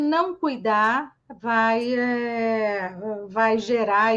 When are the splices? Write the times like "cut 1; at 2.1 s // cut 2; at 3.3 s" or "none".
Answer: none

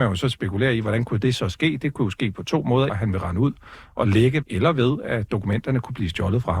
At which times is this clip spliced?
cut 1; at 2.9 s // cut 2; at 4.4 s

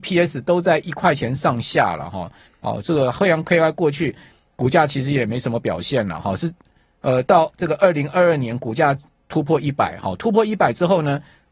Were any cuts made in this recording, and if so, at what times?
cut 1; at 2.5 s

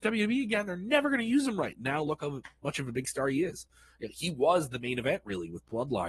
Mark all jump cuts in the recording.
none

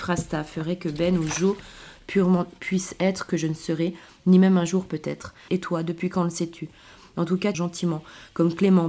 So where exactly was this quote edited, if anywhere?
cut 1; at 5.5 s // cut 2; at 7.5 s

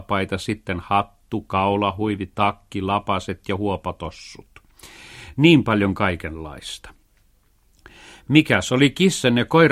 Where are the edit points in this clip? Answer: none

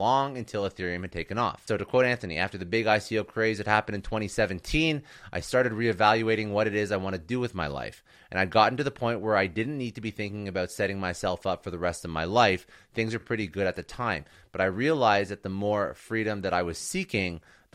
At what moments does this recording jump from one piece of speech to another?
none

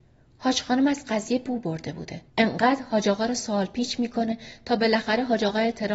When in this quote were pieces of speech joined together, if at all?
cut 1; at 2.3 s

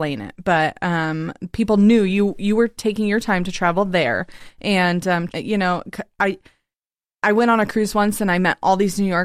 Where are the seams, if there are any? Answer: cut 1; at 5.3 s

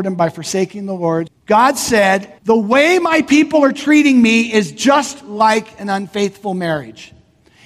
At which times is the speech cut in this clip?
cut 1; at 1.3 s // cut 2; at 2.4 s

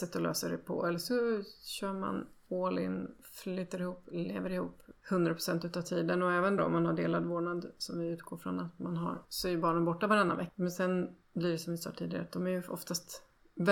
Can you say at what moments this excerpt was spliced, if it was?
cut 1; at 6.6 s

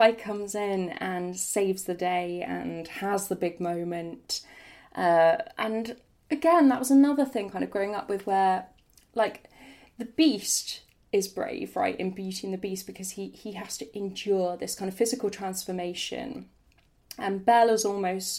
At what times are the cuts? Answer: none

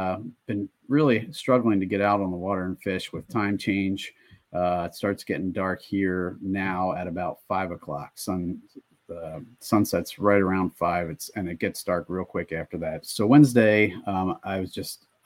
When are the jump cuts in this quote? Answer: cut 1; at 13.0 s

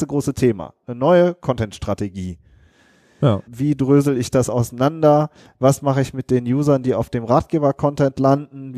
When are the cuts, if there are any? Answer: cut 1; at 3.5 s

